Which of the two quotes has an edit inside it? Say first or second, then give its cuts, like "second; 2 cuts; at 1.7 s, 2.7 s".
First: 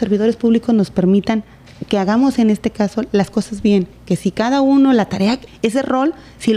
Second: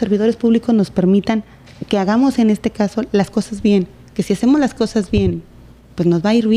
first; 2 cuts; at 3.9 s, 5.5 s